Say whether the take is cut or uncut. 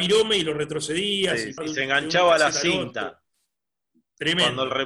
cut